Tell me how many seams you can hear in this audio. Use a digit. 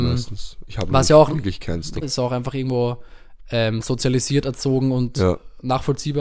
1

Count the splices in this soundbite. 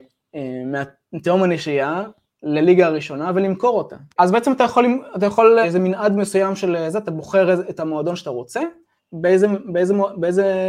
3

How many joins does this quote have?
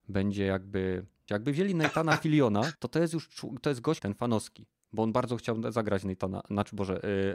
3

